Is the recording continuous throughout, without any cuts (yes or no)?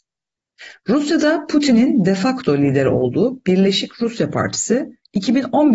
yes